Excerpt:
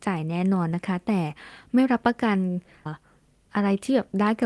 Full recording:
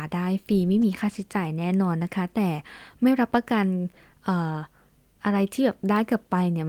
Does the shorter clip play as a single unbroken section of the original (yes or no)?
no